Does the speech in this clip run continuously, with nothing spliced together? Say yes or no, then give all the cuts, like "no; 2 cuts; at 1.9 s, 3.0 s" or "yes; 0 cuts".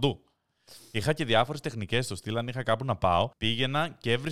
no; 1 cut; at 3.3 s